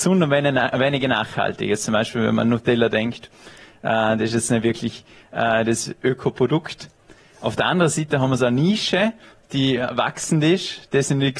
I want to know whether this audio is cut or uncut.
uncut